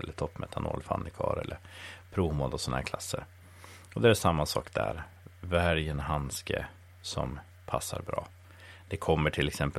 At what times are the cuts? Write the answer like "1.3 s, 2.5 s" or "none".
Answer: none